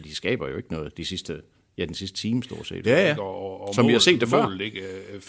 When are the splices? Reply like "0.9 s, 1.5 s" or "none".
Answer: 2.8 s